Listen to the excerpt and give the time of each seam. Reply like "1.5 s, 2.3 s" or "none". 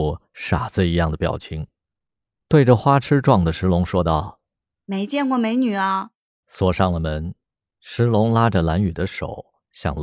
2.4 s, 6.4 s